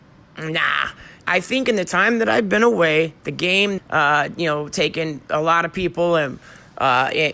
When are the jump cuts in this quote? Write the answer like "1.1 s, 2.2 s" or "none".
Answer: 1.2 s, 3.8 s